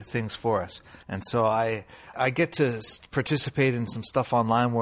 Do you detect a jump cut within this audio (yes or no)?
yes